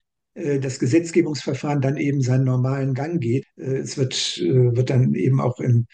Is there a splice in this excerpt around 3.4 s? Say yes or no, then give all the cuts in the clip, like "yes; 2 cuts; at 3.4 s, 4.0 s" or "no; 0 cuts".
yes; 1 cut; at 3.4 s